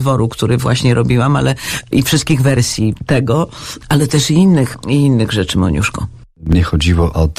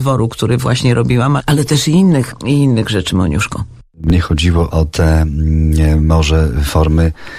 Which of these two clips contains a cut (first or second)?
second